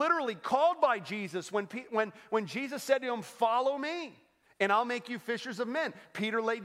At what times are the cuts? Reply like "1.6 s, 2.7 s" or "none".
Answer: none